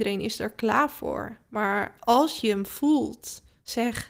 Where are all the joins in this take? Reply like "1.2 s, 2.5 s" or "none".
none